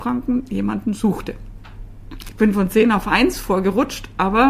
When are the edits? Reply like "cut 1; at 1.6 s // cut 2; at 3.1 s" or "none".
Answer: cut 1; at 2.2 s